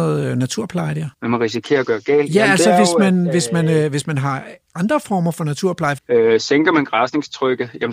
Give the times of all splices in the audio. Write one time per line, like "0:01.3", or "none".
0:01.1
0:06.0